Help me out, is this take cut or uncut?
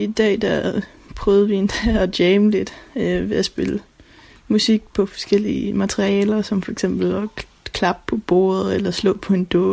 uncut